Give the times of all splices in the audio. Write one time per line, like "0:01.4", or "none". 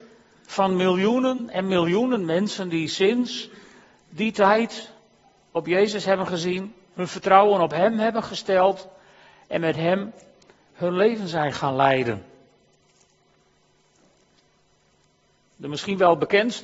none